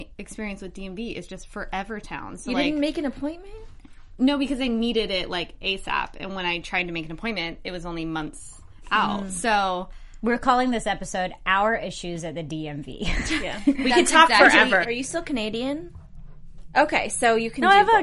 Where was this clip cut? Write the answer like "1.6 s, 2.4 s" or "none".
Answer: 14.8 s, 16.7 s